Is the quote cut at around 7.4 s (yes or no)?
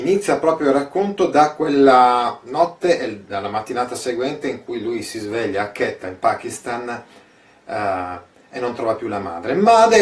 no